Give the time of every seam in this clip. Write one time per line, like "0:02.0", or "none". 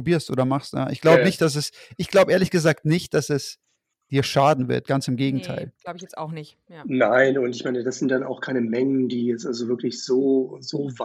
none

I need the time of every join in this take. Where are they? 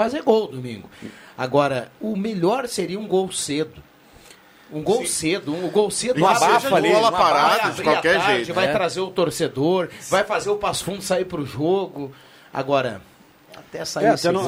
none

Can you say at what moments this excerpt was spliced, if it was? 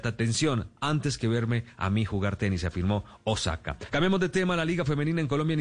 0:03.9

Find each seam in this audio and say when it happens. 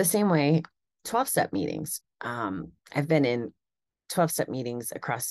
0:02.0

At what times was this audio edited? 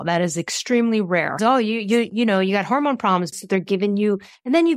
0:01.4
0:03.3

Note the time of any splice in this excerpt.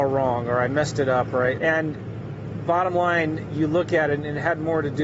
0:01.6

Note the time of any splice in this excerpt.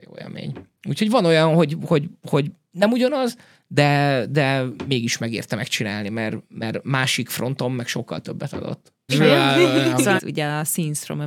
0:09.1
0:10.2

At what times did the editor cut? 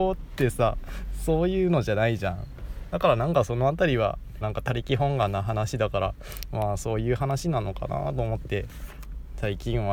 0:04.4

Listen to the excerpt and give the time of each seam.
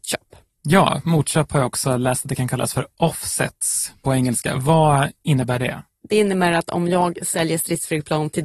none

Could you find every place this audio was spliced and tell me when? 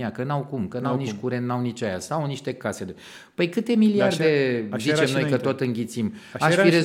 none

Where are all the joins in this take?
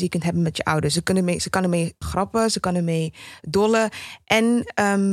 0:02.0

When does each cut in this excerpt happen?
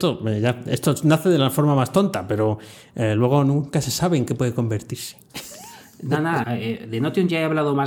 0:06.4

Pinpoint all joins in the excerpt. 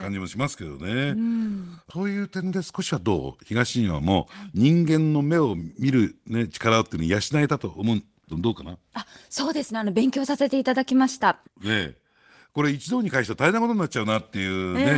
0:08.3
0:11.4

